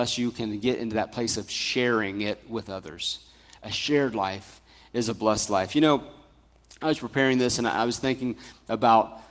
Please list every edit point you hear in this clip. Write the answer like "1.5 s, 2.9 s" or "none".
none